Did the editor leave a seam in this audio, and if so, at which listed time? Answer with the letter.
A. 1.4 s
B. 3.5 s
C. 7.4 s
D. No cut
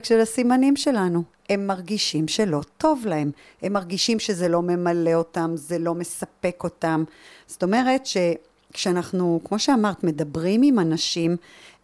C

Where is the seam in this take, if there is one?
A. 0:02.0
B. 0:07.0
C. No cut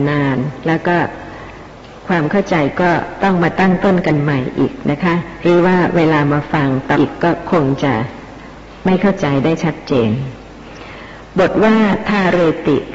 B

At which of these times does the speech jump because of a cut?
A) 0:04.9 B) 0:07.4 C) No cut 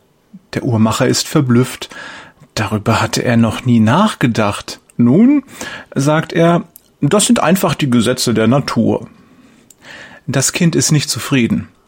A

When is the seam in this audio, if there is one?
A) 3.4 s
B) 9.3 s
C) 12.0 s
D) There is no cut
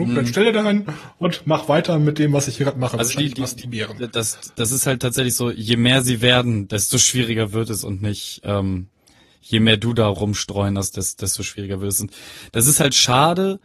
D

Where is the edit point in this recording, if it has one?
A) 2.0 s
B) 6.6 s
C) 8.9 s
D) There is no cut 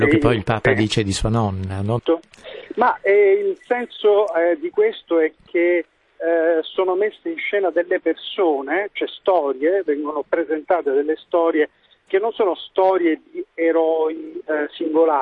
A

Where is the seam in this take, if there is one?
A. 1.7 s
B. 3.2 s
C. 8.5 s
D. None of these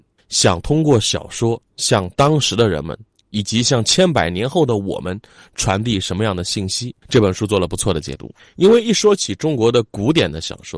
A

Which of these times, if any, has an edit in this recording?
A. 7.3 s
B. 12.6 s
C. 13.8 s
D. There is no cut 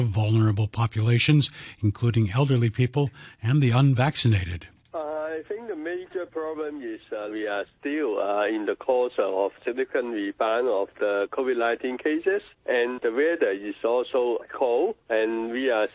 A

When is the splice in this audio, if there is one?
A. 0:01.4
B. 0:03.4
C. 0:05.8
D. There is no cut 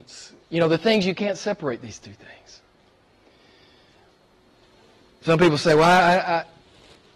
D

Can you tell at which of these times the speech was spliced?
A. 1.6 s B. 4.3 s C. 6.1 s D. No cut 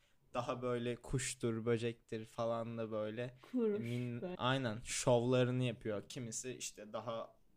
B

